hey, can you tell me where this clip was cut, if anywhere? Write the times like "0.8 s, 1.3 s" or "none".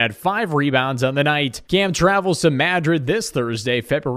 1.6 s